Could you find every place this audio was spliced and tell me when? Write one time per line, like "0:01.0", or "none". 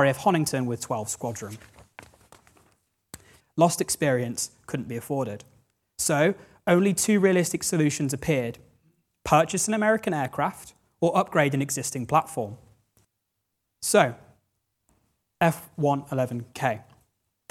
0:03.4